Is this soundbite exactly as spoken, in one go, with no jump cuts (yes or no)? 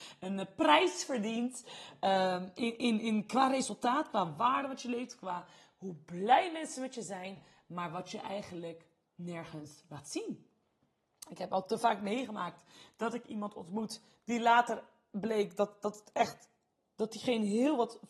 yes